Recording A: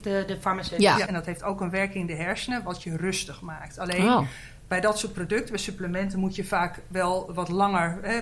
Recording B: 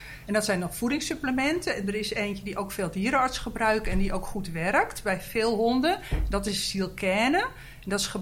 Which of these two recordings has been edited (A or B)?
A